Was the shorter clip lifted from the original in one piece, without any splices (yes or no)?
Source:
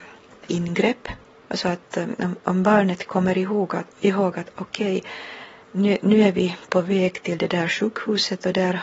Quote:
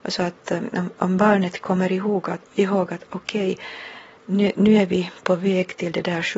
yes